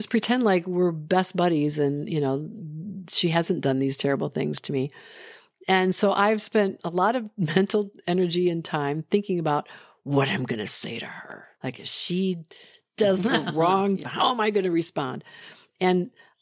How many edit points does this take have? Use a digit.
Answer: 2